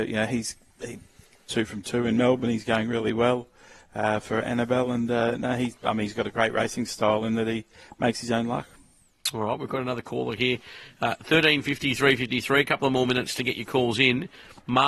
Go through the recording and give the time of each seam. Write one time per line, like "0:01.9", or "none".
none